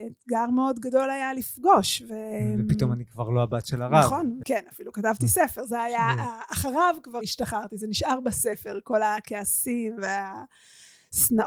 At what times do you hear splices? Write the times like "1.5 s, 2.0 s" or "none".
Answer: 4.4 s, 7.2 s